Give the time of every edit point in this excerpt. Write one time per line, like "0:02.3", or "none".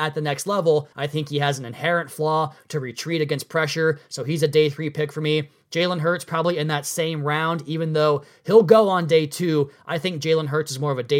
0:00.9